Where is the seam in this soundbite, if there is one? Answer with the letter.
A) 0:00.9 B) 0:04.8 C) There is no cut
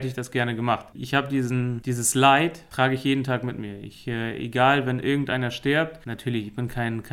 A